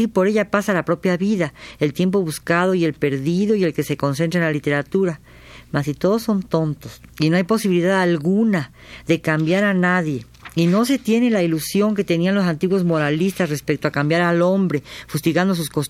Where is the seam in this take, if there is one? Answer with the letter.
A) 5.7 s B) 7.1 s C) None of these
B